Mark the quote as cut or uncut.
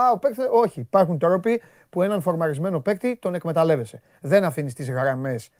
uncut